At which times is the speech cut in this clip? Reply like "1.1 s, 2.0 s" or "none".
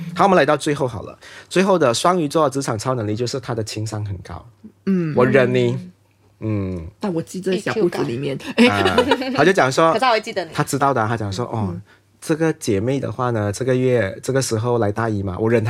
none

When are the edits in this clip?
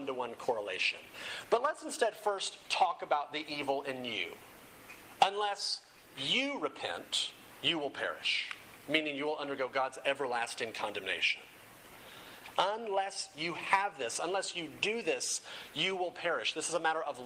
12.5 s

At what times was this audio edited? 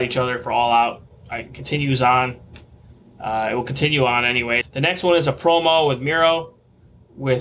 4.6 s

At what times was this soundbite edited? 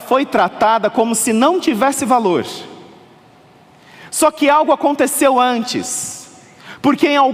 none

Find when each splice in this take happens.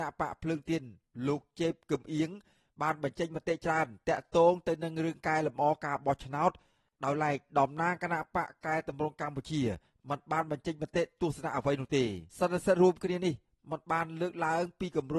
12.3 s

